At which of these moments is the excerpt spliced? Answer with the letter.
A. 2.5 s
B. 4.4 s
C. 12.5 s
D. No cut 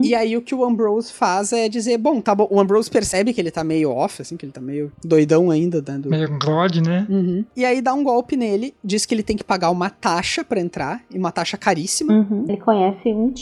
C